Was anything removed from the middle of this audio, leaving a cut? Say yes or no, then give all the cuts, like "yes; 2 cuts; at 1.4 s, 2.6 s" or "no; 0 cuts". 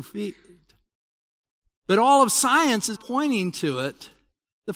yes; 2 cuts; at 1.7 s, 2.9 s